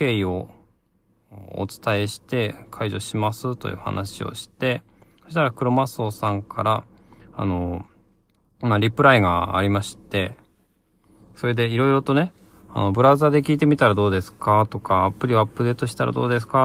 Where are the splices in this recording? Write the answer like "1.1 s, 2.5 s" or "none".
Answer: none